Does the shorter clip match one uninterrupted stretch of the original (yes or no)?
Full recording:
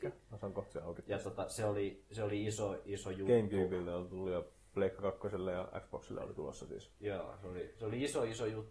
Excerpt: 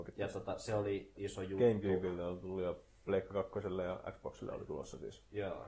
no